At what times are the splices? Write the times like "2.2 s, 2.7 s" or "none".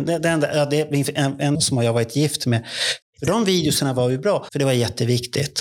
1.5 s, 3.0 s, 4.5 s